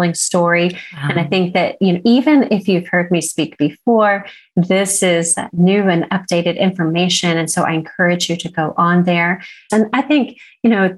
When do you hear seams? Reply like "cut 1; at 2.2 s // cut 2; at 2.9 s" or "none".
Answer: cut 1; at 9.7 s